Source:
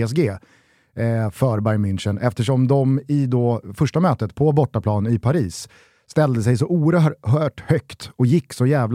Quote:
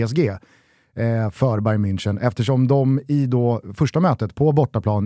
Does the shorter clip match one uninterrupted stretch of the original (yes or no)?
yes